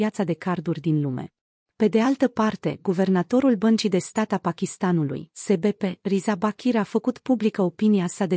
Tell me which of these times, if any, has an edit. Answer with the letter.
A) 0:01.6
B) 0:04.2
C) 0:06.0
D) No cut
A